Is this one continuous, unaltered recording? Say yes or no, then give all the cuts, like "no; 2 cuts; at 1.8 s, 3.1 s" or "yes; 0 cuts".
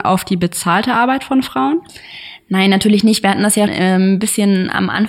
no; 1 cut; at 3.7 s